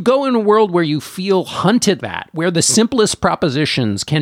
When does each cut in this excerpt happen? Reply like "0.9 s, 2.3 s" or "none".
2.0 s